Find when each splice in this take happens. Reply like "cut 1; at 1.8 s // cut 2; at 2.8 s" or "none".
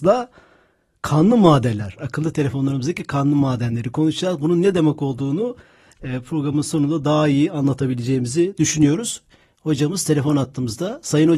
cut 1; at 2.0 s